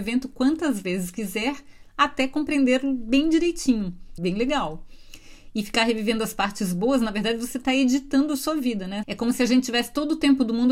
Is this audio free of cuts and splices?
no; 2 cuts; at 4.2 s, 9.0 s

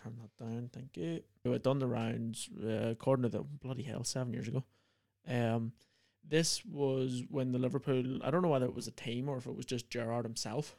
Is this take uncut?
no; 1 cut; at 1.5 s

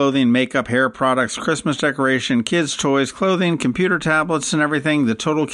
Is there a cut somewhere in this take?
no; 0 cuts

